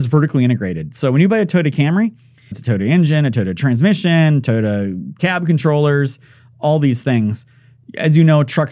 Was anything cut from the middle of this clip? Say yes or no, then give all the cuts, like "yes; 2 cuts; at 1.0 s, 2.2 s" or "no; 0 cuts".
yes; 1 cut; at 2.5 s